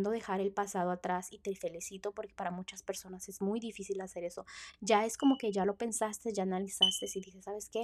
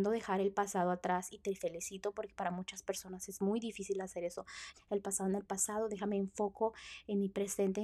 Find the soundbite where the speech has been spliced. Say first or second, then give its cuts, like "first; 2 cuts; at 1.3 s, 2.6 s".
second; 1 cut; at 4.7 s